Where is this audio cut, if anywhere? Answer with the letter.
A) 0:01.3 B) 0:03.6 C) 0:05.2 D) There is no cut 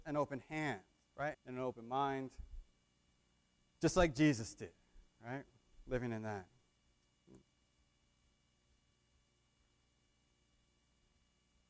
A